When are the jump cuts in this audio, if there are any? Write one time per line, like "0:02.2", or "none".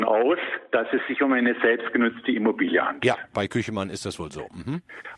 none